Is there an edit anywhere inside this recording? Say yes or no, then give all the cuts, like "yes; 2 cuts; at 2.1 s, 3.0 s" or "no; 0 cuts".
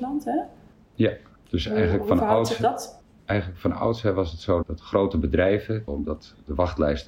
yes; 2 cuts; at 4.6 s, 5.9 s